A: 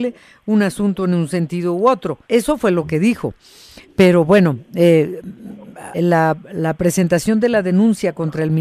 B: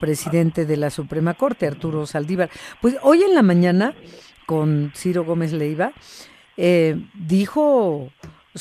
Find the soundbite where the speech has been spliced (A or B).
A